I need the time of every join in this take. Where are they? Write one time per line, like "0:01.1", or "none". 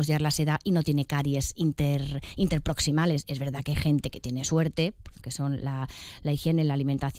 0:03.2
0:05.2